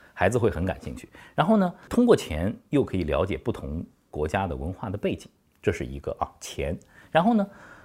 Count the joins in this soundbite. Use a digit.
0